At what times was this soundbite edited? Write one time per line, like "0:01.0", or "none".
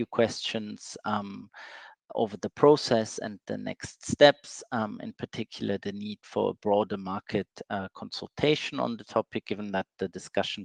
none

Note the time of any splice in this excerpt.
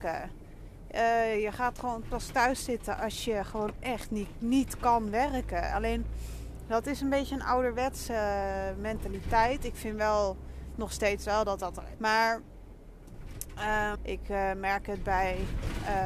0:11.9
0:13.9

